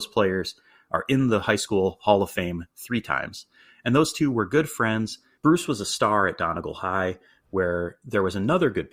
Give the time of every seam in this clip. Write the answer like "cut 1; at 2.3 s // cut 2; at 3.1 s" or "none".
cut 1; at 5.4 s